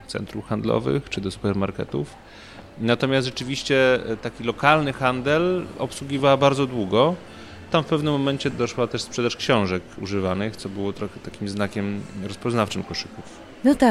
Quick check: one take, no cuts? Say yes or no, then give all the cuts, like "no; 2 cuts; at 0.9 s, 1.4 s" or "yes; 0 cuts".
yes; 0 cuts